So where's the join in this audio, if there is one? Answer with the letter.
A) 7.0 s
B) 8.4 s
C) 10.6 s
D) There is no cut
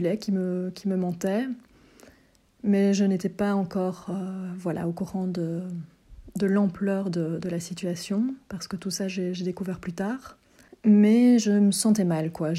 D